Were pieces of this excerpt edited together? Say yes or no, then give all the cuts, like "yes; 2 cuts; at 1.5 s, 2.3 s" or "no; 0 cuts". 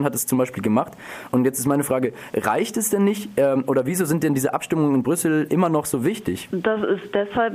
yes; 1 cut; at 6.5 s